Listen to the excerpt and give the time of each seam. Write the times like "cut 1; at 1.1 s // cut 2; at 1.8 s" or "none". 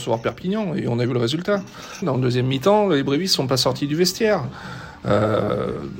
cut 1; at 2.0 s